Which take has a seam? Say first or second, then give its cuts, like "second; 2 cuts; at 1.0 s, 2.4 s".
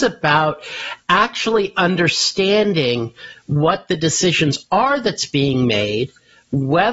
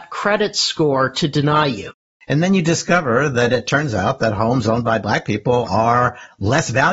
second; 1 cut; at 2.2 s